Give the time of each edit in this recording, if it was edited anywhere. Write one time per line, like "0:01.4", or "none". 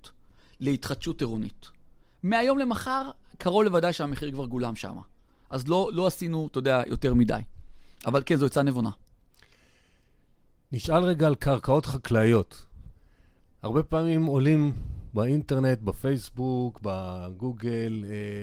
none